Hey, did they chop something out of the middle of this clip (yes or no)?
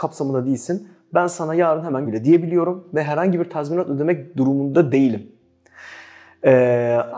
yes